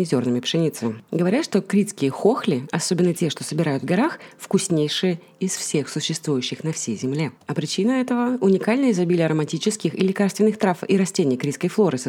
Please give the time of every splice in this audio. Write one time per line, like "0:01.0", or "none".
0:07.4